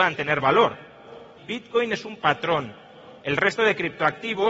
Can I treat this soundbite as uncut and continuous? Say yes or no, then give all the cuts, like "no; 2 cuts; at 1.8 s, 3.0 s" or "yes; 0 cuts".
no; 1 cut; at 1.4 s